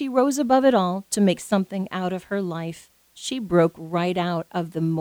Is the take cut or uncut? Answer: uncut